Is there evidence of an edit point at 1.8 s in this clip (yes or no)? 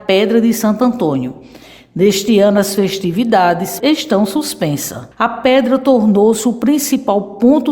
no